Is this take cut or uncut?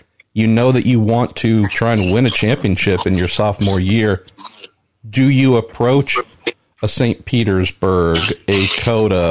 uncut